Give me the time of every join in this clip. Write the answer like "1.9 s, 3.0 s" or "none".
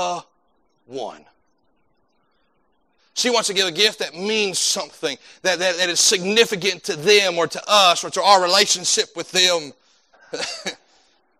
3.0 s, 10.1 s